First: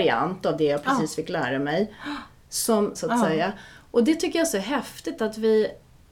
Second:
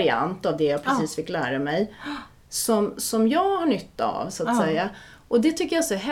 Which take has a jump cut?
first; 1 cut; at 2.9 s

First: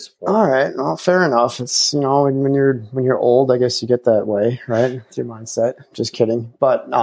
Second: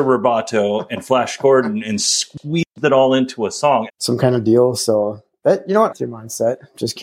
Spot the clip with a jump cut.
second; 2 cuts; at 3.9 s, 5.9 s

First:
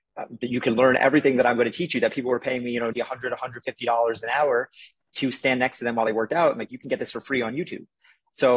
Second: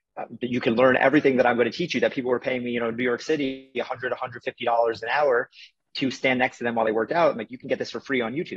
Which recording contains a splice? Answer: first; 1 cut; at 2.9 s

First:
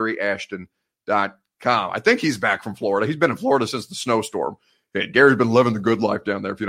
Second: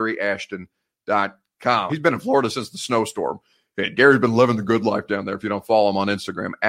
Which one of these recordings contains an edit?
second; 1 cut; at 1.9 s

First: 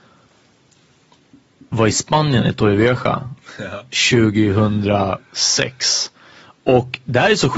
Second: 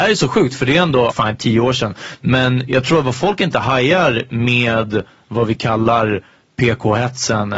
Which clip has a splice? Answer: second; 1 cut; at 1.1 s

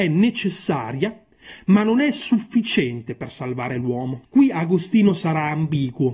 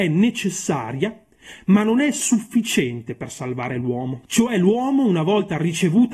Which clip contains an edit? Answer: first; 1 cut; at 4.2 s

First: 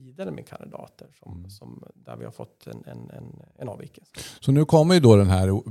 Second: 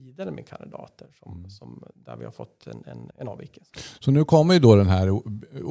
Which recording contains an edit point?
second; 1 cut; at 3.1 s

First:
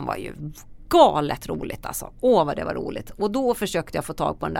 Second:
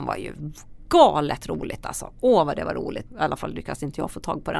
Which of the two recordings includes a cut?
second; 1 cut; at 3.1 s

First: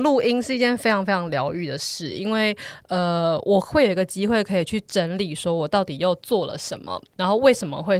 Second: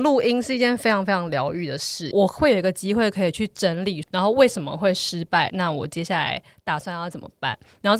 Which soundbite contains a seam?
second; 3 cuts; at 2.1 s, 4.0 s, 5.5 s

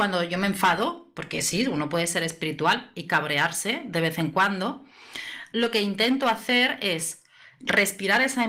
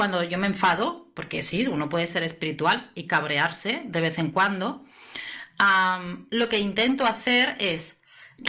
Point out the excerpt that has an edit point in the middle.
first; 1 cut; at 5.5 s

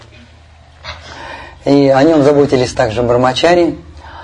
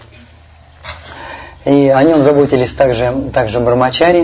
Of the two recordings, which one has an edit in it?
first; 1 cut; at 2.7 s

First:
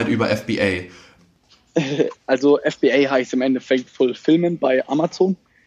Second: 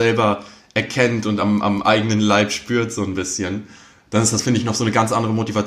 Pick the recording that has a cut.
first; 1 cut; at 1.2 s

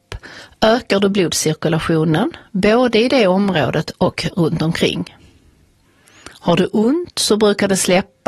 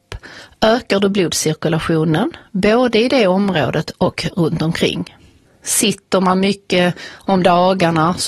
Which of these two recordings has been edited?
second; 1 cut; at 5.5 s

